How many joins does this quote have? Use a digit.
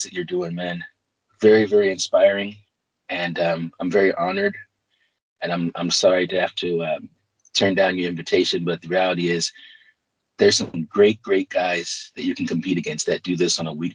0